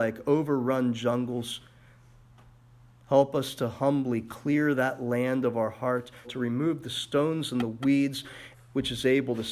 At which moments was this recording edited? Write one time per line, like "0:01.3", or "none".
0:06.2
0:08.5